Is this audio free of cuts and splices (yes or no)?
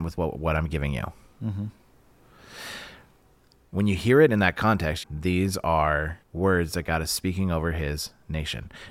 no